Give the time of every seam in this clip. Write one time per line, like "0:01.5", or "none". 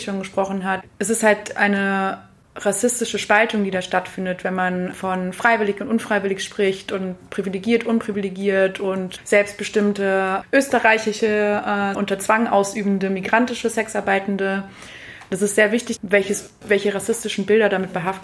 0:04.9
0:11.9
0:16.0